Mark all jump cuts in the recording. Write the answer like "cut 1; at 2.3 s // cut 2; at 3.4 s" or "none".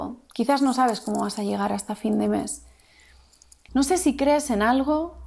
cut 1; at 3.7 s